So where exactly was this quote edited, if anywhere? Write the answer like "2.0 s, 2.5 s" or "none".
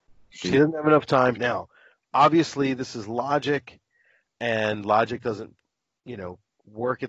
1.4 s